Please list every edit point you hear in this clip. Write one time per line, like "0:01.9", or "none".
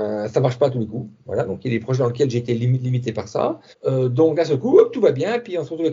0:03.7